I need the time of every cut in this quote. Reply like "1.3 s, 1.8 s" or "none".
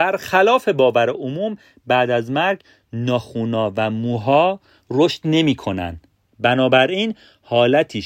6.3 s